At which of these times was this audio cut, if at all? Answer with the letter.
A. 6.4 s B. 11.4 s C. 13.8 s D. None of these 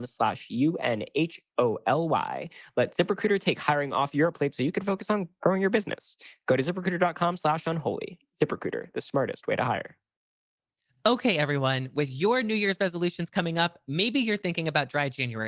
D